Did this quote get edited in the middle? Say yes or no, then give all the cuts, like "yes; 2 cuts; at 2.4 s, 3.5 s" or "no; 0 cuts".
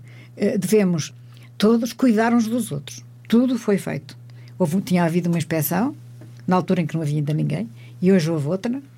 yes; 1 cut; at 3.3 s